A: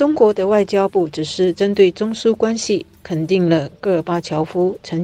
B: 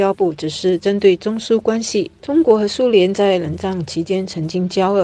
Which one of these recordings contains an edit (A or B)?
B